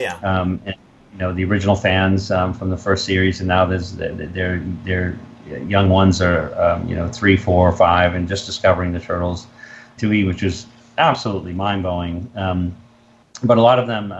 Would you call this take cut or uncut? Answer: cut